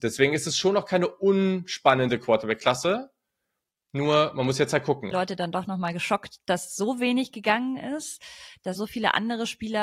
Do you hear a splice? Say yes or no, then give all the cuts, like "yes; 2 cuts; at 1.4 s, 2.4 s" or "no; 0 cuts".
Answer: yes; 2 cuts; at 5.1 s, 8.8 s